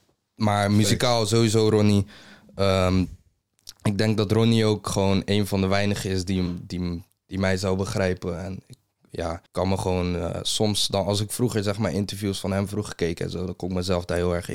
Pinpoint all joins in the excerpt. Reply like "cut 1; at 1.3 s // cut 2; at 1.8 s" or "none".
cut 1; at 9.5 s

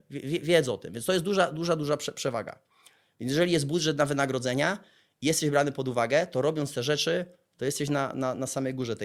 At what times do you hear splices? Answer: none

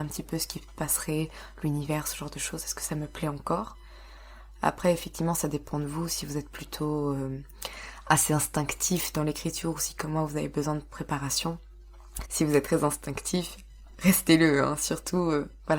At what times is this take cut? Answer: cut 1; at 12.2 s

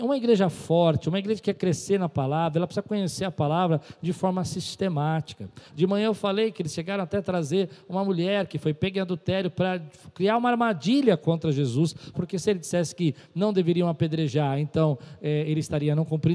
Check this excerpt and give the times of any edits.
cut 1; at 5.7 s // cut 2; at 12.1 s

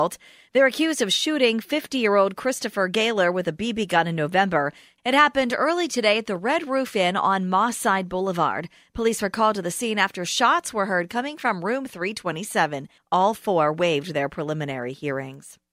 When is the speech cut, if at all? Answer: cut 1; at 5.0 s // cut 2; at 13.0 s

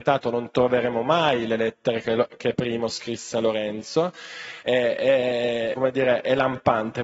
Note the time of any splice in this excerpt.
cut 1; at 4.6 s // cut 2; at 5.7 s

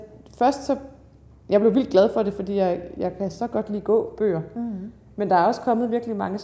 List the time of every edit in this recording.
none

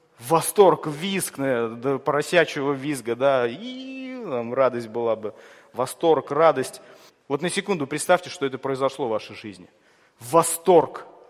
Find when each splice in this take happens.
cut 1; at 7.1 s

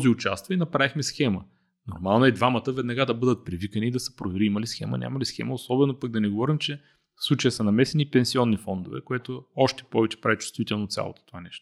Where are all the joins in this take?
none

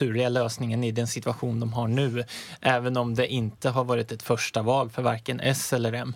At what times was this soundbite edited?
none

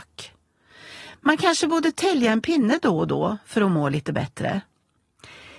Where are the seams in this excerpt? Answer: none

